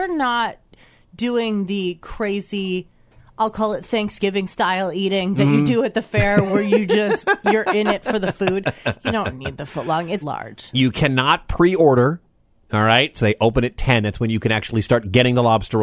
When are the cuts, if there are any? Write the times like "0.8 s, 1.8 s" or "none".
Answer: 10.2 s, 13.1 s